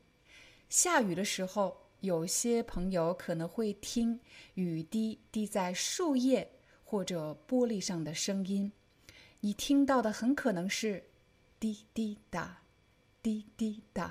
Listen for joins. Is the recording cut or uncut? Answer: uncut